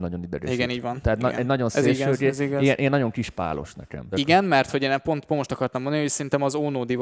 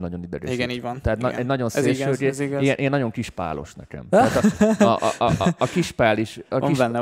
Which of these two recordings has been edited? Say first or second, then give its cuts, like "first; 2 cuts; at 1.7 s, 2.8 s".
first; 1 cut; at 4.1 s